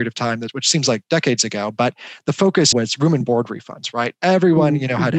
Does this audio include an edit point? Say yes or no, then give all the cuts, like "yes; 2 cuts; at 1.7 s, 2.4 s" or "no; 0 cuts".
yes; 1 cut; at 2.7 s